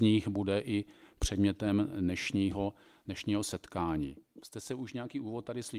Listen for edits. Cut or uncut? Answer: uncut